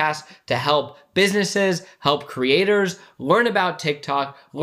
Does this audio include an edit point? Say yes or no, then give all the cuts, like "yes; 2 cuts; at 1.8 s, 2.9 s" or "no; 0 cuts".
no; 0 cuts